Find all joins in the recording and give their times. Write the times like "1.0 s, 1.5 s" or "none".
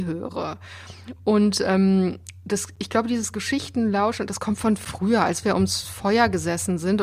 none